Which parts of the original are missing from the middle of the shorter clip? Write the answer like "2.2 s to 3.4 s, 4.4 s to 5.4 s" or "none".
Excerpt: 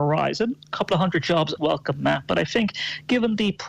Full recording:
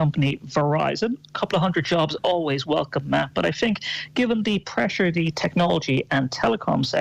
2.2 s to 2.6 s